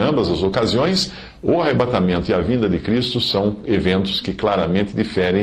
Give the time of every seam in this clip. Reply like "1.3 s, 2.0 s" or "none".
none